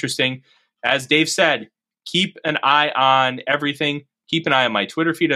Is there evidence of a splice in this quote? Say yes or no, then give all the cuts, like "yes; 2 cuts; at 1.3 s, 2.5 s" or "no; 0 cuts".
no; 0 cuts